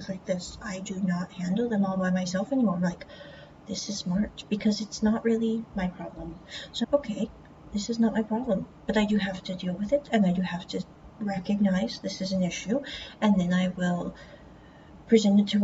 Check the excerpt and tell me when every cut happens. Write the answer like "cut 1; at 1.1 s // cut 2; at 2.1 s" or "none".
cut 1; at 6.8 s // cut 2; at 11.1 s